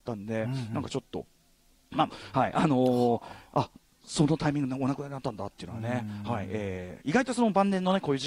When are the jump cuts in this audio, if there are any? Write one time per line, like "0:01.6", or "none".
0:02.1